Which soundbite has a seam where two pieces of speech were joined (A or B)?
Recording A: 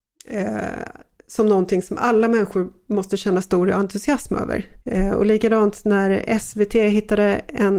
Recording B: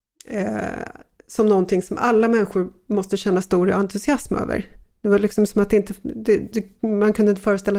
A